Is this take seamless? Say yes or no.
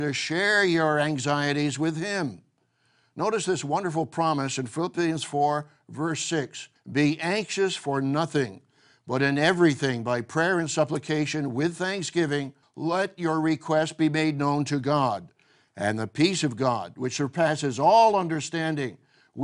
yes